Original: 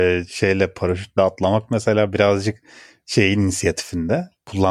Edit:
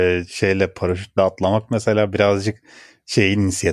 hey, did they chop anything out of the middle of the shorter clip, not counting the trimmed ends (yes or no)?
no